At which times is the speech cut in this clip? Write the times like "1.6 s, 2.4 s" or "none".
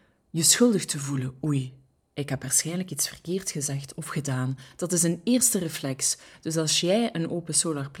none